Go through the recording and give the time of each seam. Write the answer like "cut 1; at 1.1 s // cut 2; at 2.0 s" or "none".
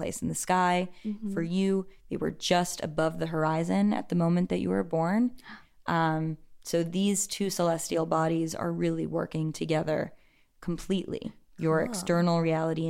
none